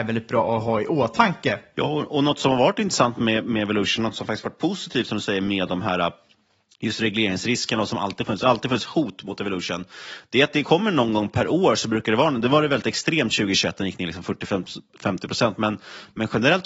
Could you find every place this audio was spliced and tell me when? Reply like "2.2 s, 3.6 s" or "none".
none